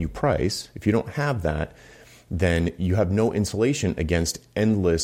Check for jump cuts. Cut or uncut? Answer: uncut